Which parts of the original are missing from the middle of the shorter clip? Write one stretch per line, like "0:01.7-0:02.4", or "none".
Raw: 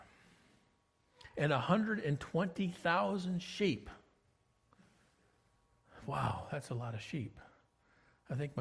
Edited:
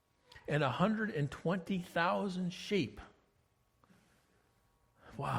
none